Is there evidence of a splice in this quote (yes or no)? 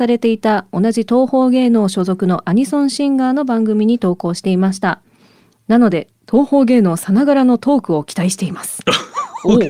no